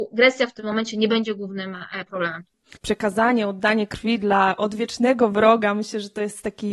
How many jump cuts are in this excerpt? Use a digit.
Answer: 1